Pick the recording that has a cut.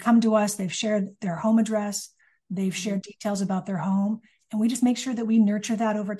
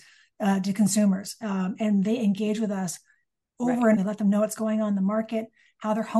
second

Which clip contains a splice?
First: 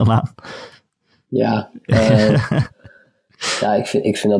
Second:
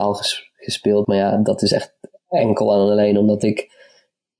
second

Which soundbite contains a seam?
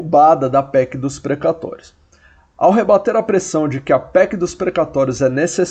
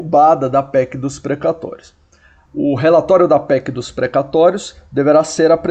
second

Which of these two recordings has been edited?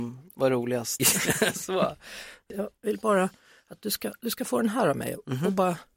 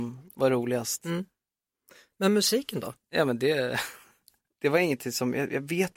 first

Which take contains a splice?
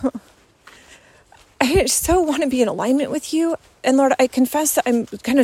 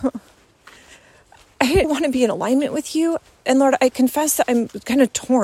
second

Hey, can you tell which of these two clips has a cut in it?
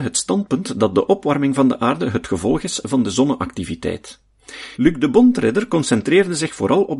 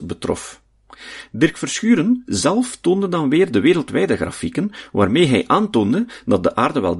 first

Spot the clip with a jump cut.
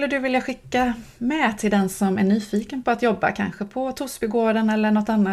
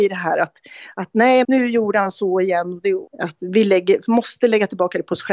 second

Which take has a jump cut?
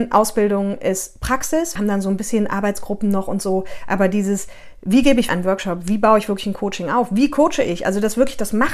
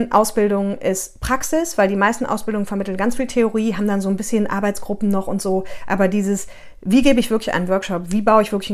first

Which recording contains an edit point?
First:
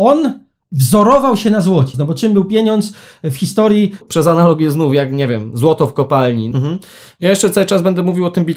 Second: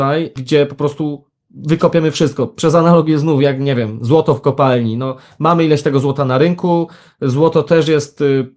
first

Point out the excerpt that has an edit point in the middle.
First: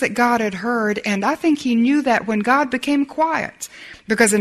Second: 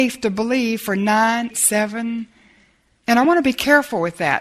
second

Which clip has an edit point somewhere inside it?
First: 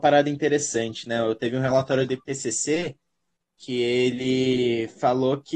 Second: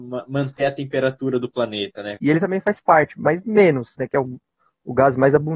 second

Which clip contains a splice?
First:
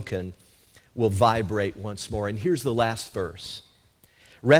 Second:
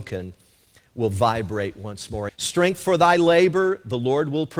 second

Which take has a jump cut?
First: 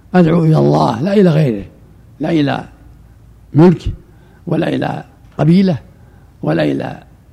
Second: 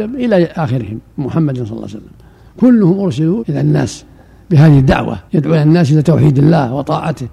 second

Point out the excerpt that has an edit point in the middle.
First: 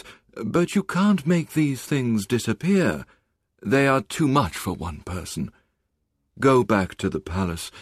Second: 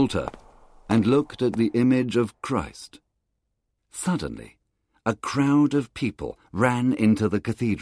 second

